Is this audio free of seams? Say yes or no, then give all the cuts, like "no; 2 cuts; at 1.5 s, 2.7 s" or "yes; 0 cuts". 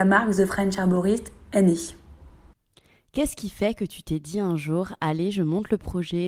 yes; 0 cuts